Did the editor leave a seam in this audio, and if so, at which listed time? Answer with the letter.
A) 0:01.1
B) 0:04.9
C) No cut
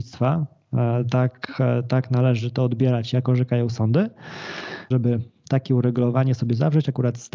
B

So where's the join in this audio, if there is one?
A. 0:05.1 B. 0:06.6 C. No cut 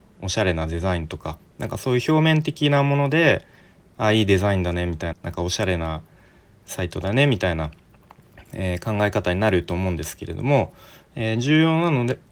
A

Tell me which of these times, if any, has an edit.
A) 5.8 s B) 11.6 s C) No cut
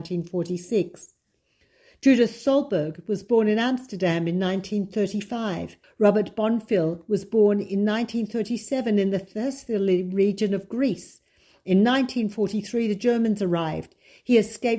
A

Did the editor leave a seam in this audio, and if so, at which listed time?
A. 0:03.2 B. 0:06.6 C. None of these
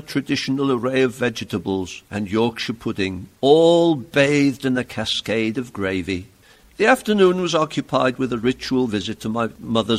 B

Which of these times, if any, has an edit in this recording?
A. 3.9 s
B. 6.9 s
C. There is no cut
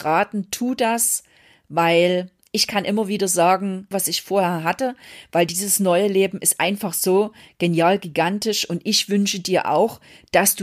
A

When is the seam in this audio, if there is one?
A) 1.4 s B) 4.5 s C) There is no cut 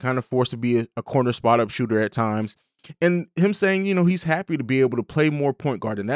C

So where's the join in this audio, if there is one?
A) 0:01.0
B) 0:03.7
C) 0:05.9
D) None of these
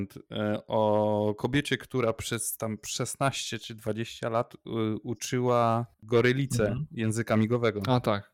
C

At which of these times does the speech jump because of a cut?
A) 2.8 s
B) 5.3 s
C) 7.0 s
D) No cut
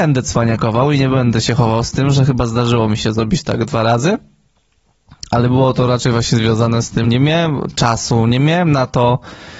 C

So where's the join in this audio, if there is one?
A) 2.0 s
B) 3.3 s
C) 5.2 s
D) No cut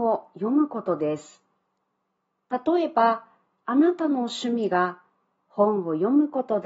D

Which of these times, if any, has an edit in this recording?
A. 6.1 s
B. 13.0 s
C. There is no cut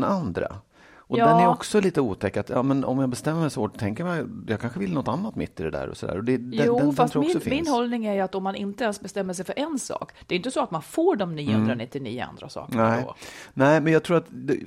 C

